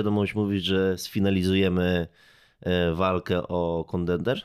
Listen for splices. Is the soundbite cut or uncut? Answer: uncut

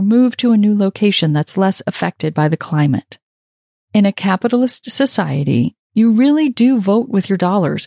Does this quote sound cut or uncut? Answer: uncut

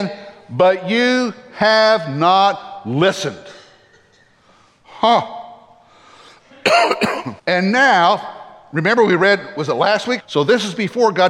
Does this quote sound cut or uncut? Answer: cut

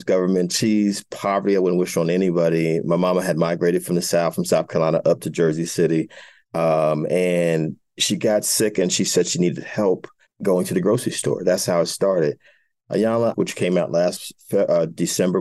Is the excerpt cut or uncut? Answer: cut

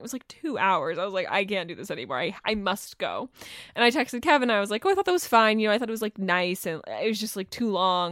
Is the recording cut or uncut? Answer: uncut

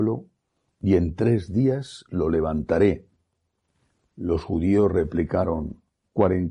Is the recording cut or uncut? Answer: uncut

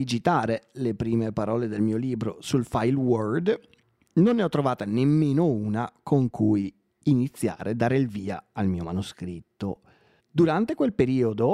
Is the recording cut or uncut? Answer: cut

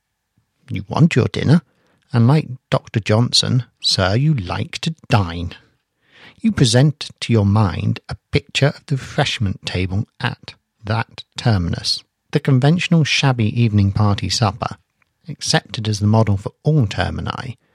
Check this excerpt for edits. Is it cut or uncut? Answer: uncut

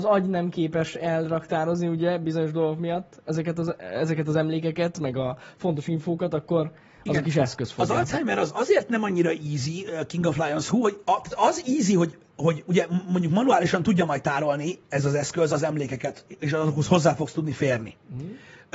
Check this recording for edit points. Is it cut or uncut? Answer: uncut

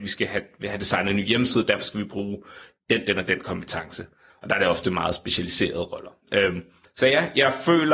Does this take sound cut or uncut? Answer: uncut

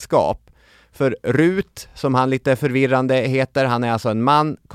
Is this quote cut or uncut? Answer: uncut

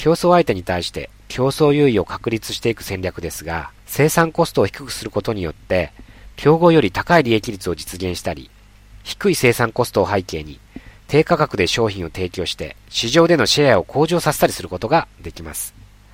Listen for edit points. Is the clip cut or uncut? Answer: cut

